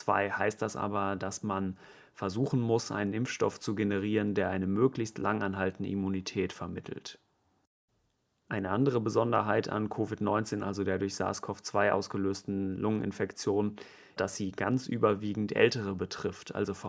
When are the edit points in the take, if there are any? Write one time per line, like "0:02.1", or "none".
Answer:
0:14.2